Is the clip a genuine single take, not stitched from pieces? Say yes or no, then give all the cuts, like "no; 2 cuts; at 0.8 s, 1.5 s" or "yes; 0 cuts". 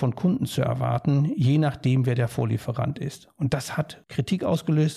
yes; 0 cuts